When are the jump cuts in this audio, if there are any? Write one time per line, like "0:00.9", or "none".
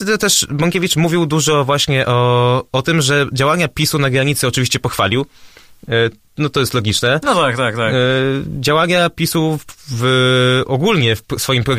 none